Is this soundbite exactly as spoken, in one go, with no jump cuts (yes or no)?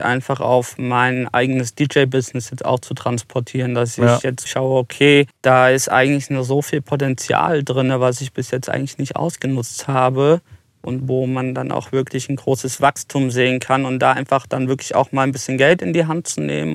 no